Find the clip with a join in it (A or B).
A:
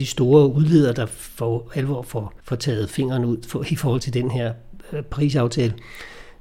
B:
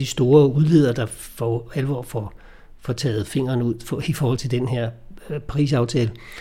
A